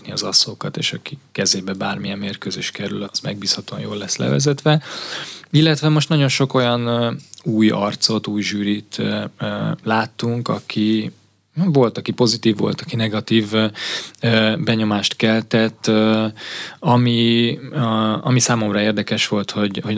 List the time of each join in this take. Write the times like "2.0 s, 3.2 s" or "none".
3.0 s